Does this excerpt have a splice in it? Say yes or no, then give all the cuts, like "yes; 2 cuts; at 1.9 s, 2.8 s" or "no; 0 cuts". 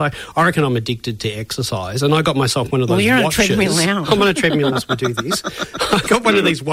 yes; 1 cut; at 4.7 s